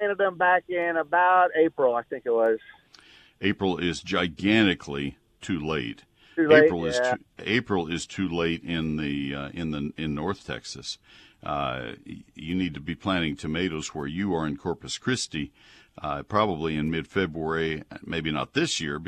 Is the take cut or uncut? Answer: cut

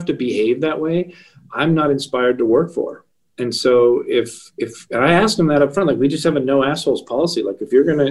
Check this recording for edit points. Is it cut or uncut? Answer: uncut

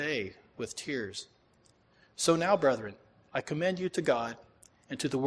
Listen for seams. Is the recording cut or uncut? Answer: uncut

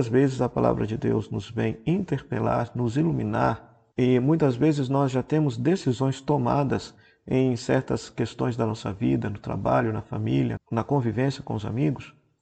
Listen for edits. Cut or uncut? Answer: cut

